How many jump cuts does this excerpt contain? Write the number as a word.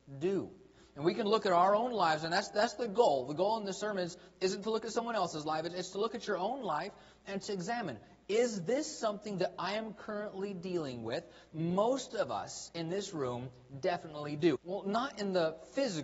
two